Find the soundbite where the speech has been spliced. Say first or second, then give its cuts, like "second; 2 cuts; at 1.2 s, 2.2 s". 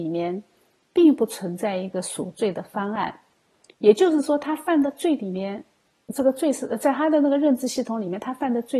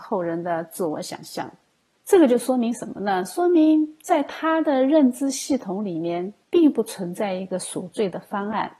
second; 2 cuts; at 1.9 s, 6.4 s